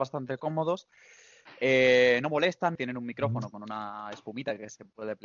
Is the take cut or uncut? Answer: cut